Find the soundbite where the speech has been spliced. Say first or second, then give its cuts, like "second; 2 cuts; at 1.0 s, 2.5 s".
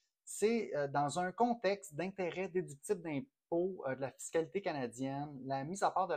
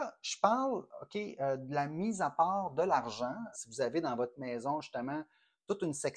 second; 1 cut; at 3.5 s